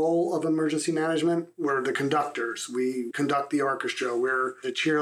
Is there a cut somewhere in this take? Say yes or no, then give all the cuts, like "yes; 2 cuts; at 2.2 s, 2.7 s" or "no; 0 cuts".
yes; 1 cut; at 1.5 s